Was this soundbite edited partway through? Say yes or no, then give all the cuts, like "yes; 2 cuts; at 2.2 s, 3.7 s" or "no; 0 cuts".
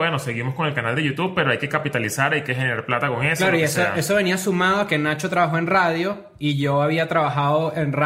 no; 0 cuts